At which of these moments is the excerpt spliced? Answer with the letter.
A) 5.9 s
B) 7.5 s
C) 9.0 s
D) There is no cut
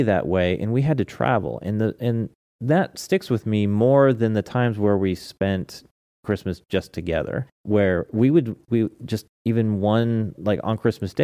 B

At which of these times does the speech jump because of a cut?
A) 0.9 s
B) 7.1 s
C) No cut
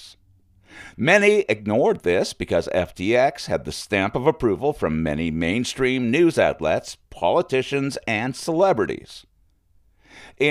A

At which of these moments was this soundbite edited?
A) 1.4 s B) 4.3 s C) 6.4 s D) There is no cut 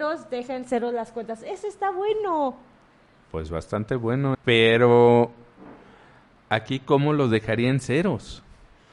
B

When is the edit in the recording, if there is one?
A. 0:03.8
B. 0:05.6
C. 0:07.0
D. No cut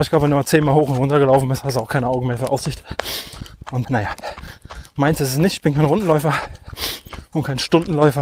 A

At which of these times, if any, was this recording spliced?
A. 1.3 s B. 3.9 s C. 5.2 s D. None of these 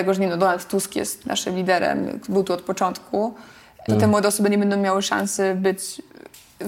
B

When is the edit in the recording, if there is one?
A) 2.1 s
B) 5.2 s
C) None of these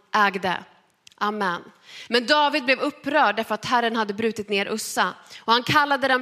A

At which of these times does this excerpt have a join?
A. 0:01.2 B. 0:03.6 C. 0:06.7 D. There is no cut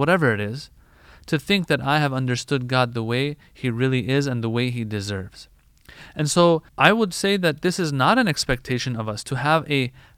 C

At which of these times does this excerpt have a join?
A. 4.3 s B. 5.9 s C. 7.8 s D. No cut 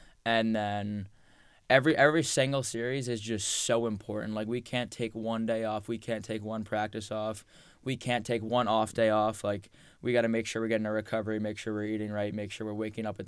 D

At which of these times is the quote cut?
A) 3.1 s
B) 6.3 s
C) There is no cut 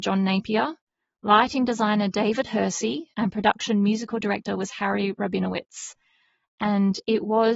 A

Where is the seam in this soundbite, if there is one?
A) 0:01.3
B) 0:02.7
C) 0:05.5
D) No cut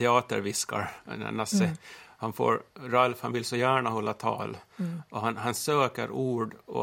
B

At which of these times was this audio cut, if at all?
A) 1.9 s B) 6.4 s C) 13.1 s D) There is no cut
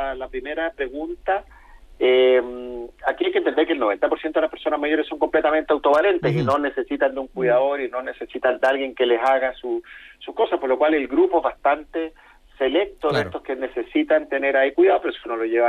D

